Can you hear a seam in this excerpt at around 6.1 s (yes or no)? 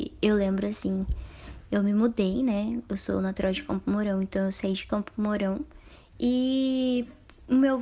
yes